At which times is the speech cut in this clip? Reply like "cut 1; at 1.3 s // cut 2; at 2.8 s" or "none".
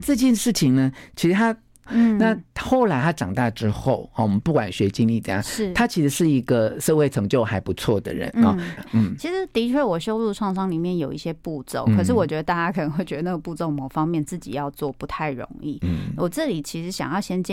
cut 1; at 1.9 s // cut 2; at 8.8 s